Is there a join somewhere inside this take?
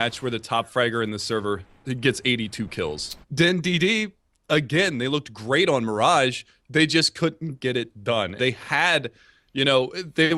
yes; 2 cuts; at 3.2 s, 8.4 s

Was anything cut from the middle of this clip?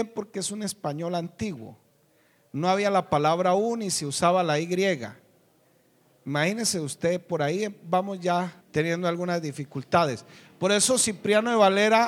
yes; 1 cut; at 8.6 s

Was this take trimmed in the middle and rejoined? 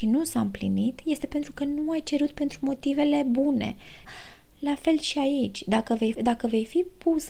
yes; 2 cuts; at 4.0 s, 6.1 s

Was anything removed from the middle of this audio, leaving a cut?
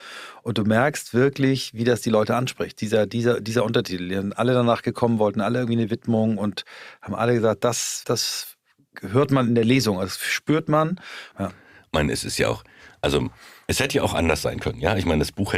yes; 2 cuts; at 8.0 s, 11.3 s

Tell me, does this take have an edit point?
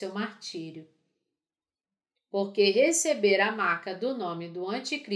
no; 0 cuts

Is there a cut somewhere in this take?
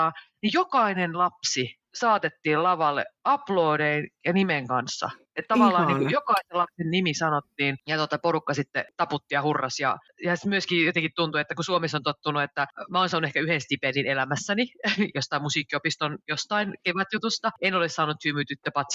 no; 0 cuts

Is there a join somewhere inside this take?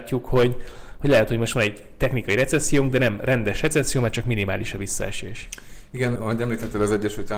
yes; 1 cut; at 6.2 s

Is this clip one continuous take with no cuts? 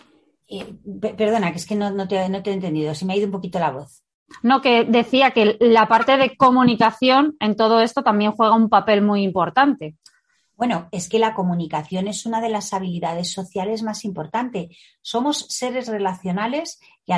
yes; 0 cuts

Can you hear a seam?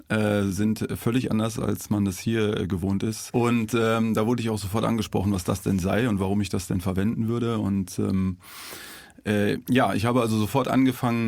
yes; 1 cut; at 3.3 s

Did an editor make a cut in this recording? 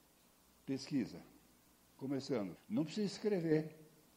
yes; 1 cut; at 2.6 s

